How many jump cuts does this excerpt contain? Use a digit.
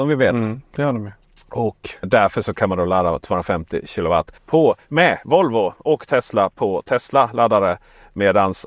2